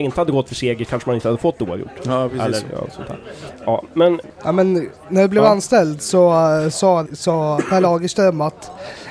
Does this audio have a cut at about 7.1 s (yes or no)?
yes